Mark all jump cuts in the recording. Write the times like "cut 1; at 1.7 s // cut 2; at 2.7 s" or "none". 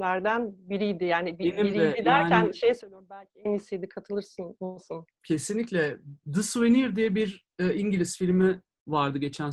none